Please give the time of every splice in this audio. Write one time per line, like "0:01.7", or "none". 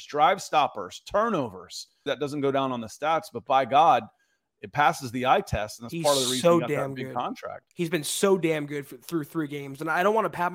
0:02.1
0:07.7